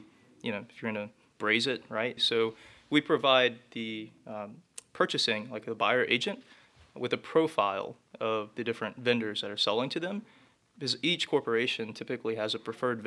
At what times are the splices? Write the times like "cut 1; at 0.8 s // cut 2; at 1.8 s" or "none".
cut 1; at 2.2 s